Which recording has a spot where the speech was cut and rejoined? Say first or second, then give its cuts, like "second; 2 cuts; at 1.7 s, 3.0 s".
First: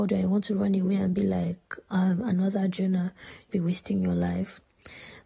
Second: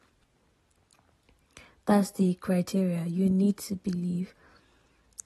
first; 1 cut; at 3.5 s